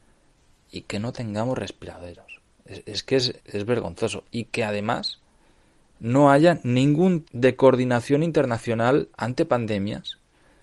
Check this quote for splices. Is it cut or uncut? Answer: cut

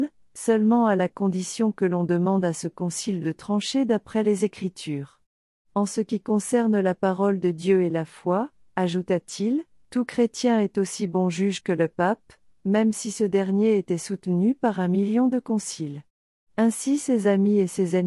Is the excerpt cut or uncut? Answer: uncut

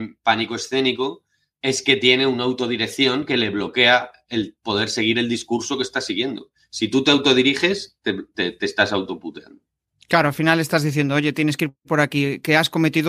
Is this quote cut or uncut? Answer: uncut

